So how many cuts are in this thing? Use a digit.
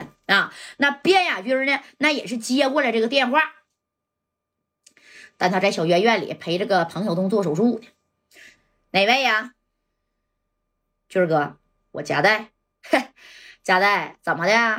0